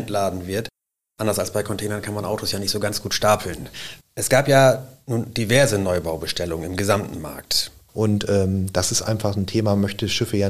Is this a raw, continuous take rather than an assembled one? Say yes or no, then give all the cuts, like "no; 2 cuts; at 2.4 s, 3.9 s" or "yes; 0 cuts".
no; 2 cuts; at 4.0 s, 7.9 s